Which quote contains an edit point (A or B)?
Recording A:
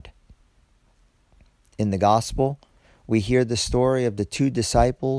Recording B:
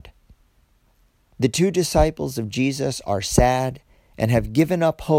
B